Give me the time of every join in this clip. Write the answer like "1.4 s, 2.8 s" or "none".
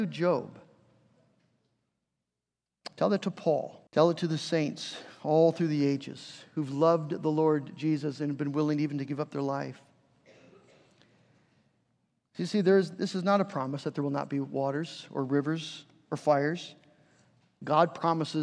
3.9 s